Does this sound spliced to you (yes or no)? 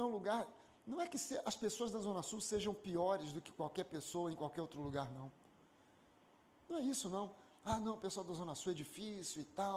no